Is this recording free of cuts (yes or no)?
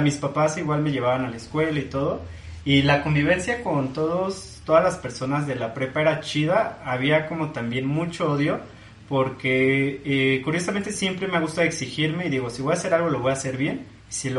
yes